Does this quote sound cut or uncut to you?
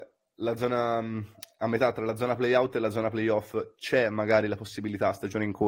uncut